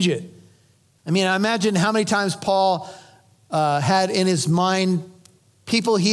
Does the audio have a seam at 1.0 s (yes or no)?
yes